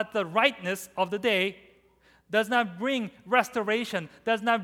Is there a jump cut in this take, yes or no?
no